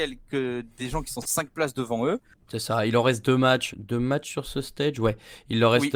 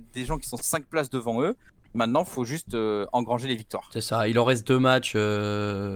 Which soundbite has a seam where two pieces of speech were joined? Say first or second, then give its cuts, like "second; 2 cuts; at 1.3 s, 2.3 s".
first; 2 cuts; at 2.5 s, 3.7 s